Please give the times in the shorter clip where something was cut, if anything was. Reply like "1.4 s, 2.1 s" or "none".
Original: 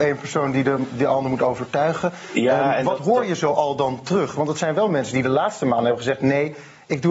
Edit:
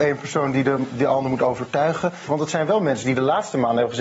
2.3 s